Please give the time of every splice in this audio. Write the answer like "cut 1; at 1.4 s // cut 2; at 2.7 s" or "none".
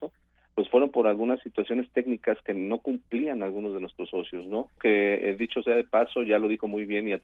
cut 1; at 4.8 s